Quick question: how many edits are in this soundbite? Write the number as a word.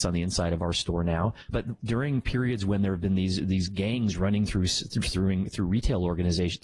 one